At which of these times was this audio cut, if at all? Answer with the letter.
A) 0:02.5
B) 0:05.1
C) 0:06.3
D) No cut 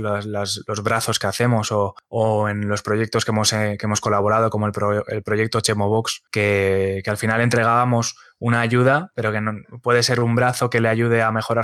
D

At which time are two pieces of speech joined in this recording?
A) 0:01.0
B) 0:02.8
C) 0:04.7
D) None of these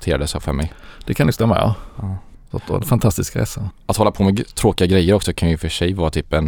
B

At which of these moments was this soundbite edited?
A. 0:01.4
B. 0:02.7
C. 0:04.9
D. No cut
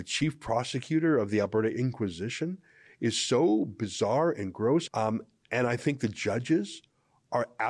C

